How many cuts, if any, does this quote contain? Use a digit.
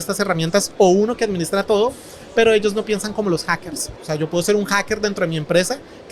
1